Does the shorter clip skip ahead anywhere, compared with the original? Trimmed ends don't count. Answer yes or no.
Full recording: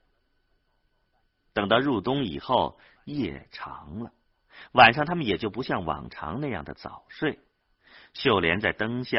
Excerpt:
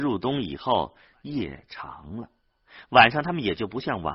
no